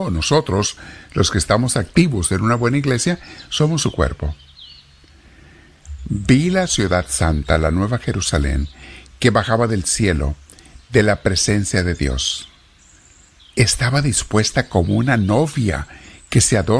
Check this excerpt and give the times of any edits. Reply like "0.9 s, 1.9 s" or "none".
6.0 s